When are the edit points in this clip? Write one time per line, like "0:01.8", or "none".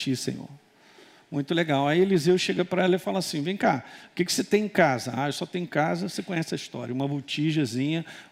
none